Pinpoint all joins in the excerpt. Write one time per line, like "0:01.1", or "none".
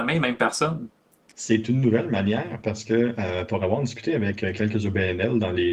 0:01.3